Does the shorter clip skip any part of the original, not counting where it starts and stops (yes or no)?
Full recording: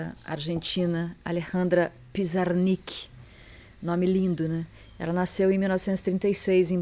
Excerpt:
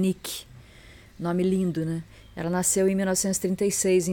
no